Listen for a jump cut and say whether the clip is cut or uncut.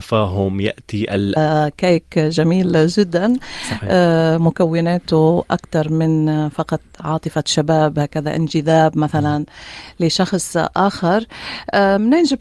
cut